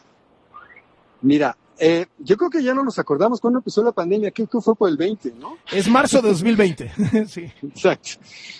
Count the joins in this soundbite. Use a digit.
0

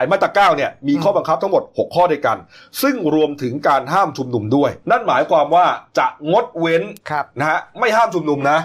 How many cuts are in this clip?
2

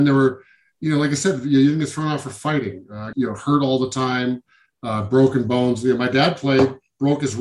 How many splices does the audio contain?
1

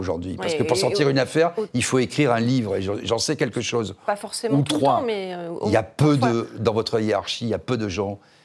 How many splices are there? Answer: 0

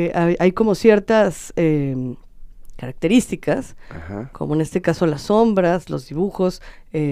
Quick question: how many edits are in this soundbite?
0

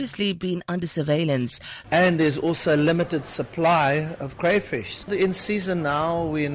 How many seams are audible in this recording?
1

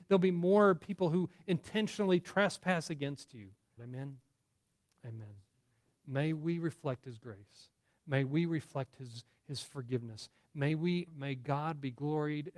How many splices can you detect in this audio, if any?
2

